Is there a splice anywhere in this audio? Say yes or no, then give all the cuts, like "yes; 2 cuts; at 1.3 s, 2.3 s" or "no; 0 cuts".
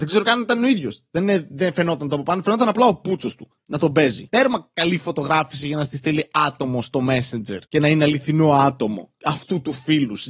yes; 2 cuts; at 4.3 s, 7.7 s